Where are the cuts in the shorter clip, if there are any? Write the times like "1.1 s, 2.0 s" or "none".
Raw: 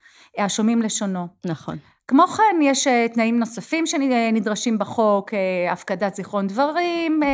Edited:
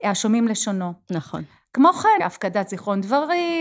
2.2 s